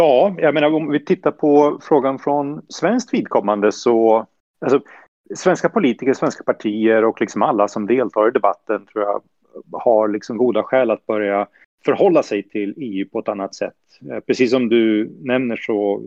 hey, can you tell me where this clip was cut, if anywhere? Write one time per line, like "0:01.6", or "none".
none